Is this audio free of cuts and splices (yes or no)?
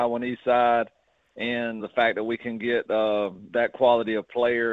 no